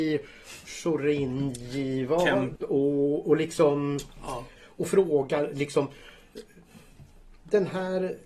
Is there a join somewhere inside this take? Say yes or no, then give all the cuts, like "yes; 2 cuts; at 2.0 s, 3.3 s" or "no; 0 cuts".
yes; 2 cuts; at 2.6 s, 4.6 s